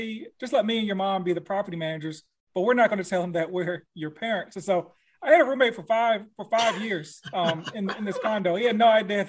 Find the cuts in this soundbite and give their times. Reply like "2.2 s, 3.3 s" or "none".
none